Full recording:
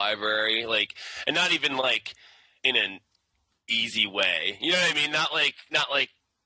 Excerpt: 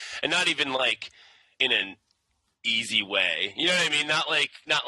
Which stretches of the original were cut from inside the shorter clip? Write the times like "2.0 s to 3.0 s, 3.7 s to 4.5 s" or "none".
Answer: none